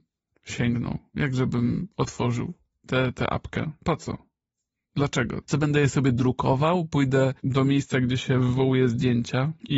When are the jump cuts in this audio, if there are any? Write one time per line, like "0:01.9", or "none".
0:05.4